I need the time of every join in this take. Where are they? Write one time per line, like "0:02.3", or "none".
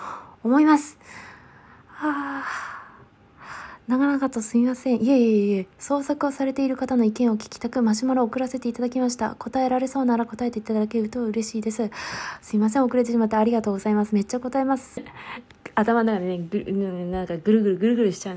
0:15.0

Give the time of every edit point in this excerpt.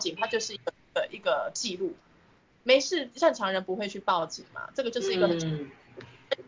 none

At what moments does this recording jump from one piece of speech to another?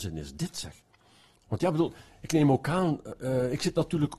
0:01.3

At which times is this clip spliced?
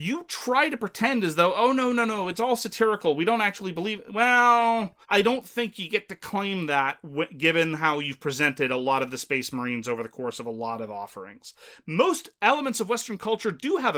0:05.0
0:11.8

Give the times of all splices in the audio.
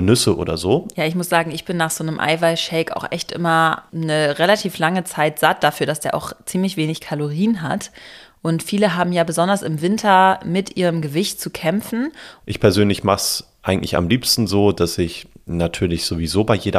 0:00.9
0:12.4

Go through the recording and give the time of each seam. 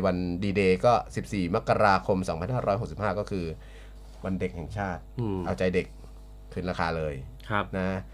none

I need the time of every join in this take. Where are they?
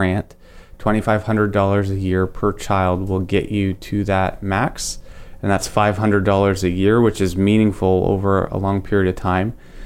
none

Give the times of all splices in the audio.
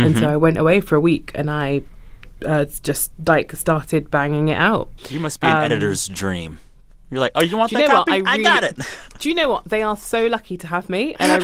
0:05.0

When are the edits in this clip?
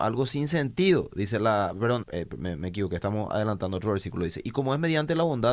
0:02.0

